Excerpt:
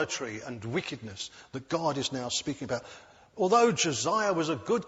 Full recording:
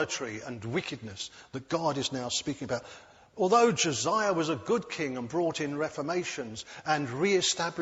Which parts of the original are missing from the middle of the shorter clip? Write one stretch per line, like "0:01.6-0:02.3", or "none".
none

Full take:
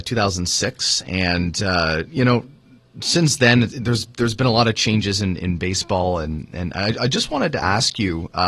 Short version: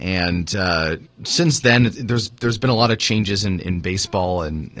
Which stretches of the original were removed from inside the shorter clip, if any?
0:02.1-0:02.8

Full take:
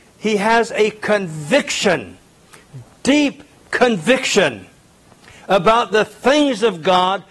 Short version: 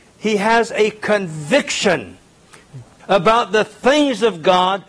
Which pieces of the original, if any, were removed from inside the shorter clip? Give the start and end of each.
0:03.0-0:05.4

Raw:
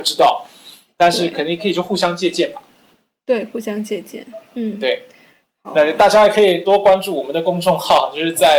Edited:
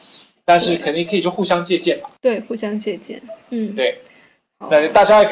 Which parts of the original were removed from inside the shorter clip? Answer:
0:02.7-0:03.2

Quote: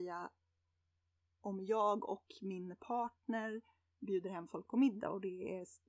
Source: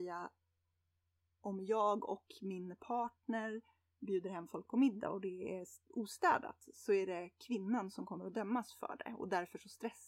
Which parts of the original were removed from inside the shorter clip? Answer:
none

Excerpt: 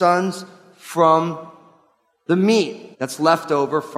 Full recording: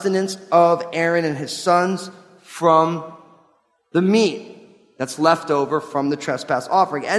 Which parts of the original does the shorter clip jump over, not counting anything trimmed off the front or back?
0:04.6-0:04.9

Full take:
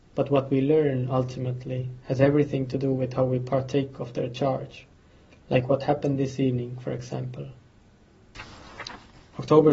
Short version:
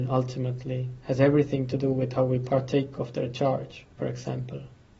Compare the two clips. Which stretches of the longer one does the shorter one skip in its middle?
0:05.0-0:06.8

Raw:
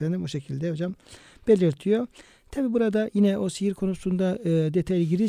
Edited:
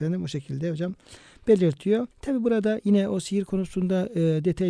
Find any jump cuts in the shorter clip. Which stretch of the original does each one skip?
0:02.1-0:02.4

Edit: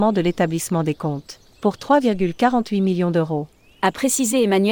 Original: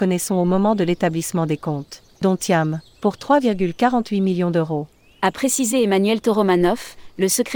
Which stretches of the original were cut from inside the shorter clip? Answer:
0:02.2-0:02.9

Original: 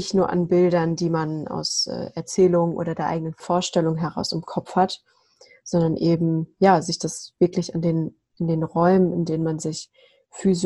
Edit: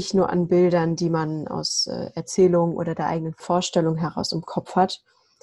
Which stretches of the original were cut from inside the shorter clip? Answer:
none

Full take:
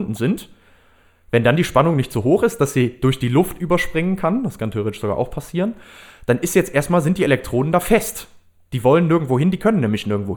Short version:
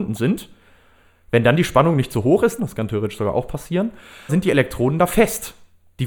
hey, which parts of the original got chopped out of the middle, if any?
0:02.6-0:04.4
0:06.1-0:07.0

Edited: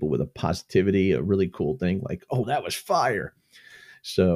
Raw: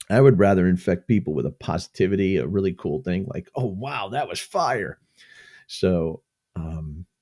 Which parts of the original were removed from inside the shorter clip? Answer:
0:03.7-0:04.1

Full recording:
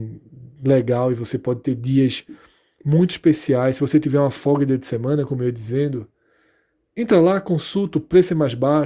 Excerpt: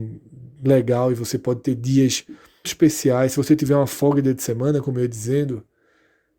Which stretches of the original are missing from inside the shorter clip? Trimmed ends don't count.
0:02.6-0:03.1

